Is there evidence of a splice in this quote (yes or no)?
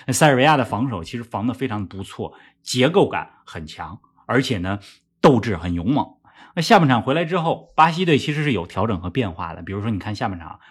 no